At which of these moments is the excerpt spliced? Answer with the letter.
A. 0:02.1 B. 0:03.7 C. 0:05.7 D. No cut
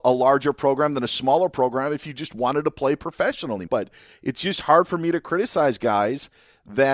B